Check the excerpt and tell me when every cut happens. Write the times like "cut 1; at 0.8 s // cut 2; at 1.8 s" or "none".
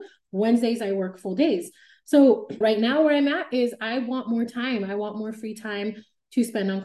cut 1; at 2.6 s